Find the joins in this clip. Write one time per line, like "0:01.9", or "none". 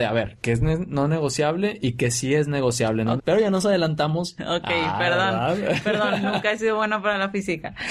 0:03.2
0:04.4

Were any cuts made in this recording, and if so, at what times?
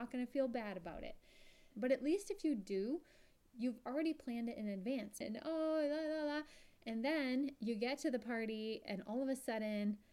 0:01.7
0:05.2

